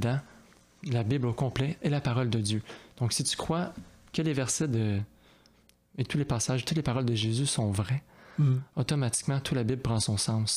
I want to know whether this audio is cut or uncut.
uncut